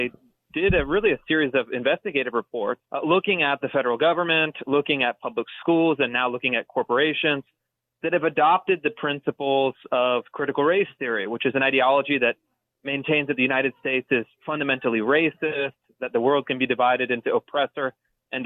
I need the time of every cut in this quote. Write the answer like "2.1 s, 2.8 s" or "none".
2.8 s